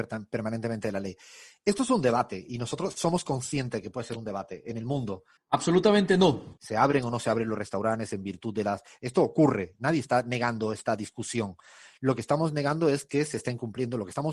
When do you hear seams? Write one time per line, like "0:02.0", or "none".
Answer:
0:05.4
0:06.6